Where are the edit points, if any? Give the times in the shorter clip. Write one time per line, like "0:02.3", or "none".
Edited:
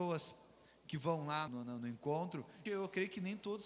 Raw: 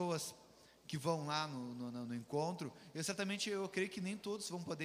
0:01.5
0:02.7